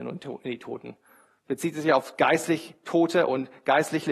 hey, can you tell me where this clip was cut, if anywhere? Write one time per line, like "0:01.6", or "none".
none